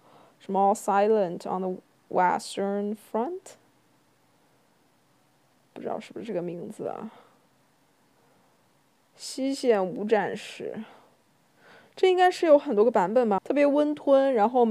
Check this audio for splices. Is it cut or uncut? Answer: cut